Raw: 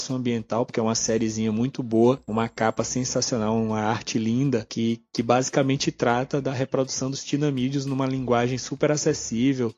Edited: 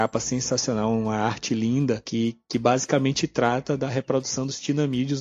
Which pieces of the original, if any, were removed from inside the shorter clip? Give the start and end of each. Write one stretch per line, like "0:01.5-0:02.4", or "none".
none